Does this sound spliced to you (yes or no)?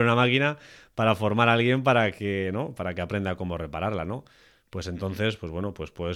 no